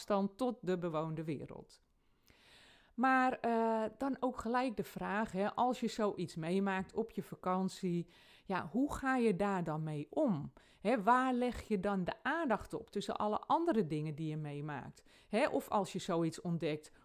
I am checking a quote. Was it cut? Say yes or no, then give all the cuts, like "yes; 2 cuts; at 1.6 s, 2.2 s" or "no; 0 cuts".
no; 0 cuts